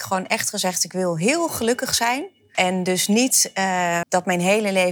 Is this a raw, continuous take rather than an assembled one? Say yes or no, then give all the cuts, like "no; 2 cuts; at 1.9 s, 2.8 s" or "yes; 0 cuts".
no; 2 cuts; at 2.5 s, 4.0 s